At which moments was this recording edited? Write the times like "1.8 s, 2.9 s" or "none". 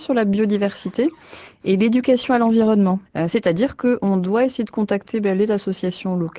3.1 s